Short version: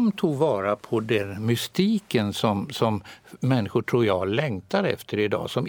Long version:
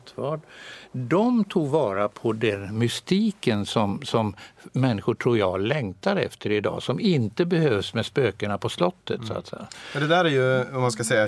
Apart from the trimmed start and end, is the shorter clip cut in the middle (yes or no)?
no